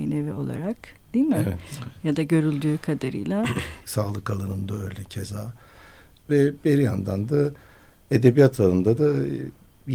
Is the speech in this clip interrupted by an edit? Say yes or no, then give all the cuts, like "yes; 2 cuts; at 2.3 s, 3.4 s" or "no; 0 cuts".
yes; 2 cuts; at 3.8 s, 6.2 s